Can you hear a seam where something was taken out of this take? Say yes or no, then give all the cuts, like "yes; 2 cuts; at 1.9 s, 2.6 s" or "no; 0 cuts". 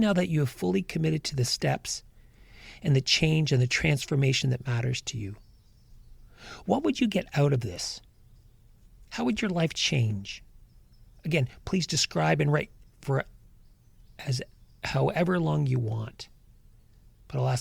no; 0 cuts